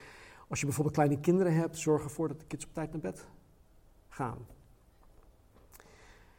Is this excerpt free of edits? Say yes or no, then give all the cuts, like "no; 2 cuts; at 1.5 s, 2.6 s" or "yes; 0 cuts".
yes; 0 cuts